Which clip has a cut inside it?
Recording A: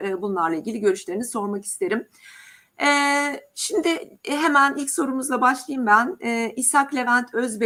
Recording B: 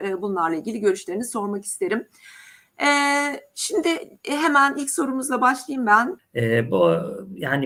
B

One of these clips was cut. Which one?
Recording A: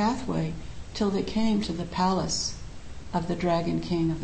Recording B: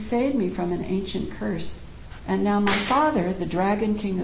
B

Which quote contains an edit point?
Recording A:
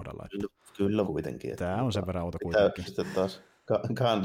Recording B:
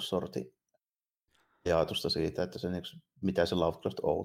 A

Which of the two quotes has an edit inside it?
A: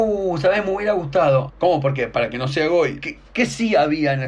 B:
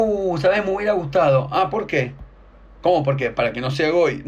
A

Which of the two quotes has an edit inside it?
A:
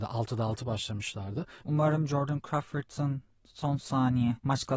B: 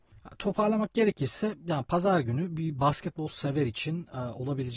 A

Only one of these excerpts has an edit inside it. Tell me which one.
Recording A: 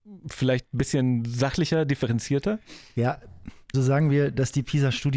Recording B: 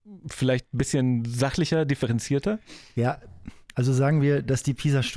A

